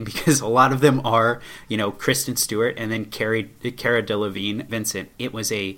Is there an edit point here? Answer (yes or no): yes